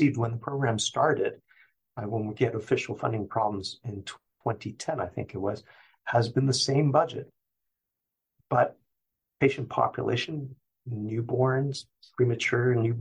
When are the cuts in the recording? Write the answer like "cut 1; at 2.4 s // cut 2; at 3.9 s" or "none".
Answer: none